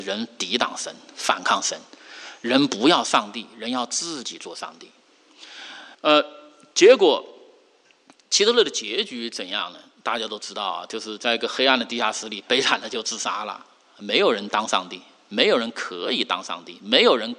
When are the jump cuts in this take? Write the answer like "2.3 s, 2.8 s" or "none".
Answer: 5.9 s